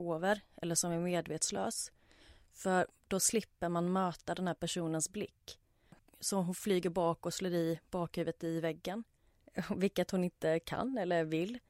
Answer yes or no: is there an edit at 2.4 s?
no